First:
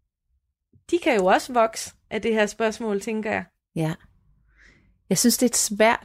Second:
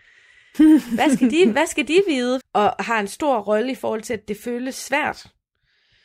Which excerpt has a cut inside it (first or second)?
second